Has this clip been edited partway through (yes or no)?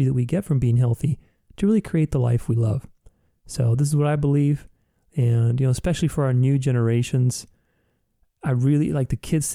no